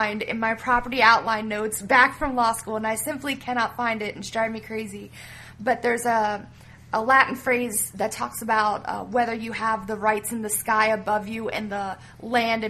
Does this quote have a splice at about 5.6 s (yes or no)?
no